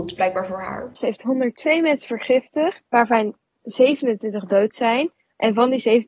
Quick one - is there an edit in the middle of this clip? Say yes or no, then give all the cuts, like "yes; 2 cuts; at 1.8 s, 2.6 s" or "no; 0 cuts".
yes; 2 cuts; at 1.0 s, 2.9 s